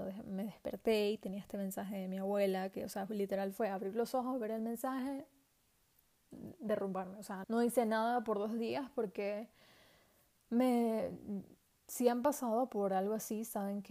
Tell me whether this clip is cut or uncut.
cut